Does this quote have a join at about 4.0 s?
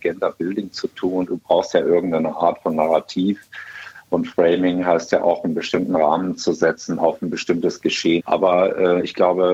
no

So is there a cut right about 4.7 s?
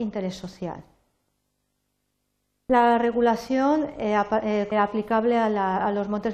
yes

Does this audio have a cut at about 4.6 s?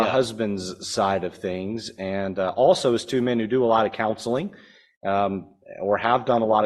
no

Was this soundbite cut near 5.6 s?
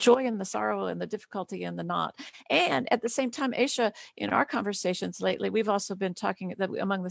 no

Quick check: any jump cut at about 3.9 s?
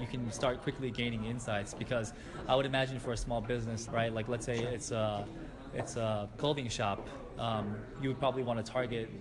yes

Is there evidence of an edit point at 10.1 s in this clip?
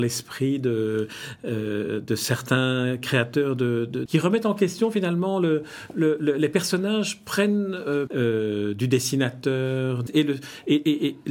yes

